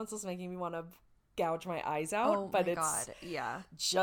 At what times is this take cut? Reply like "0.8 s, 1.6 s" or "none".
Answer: none